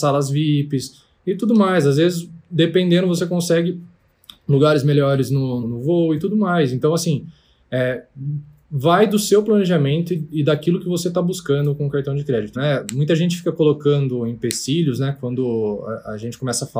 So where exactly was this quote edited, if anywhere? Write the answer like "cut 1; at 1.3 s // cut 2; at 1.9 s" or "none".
cut 1; at 5.6 s // cut 2; at 12.5 s